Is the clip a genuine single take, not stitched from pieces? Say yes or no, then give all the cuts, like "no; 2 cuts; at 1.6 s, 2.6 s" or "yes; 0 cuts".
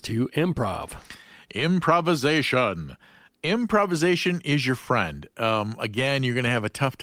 yes; 0 cuts